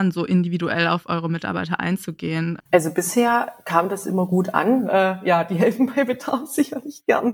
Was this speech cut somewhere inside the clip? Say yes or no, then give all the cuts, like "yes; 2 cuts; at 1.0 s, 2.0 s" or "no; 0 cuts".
yes; 2 cuts; at 2.6 s, 4.8 s